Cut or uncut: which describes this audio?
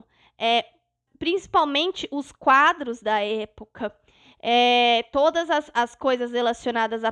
cut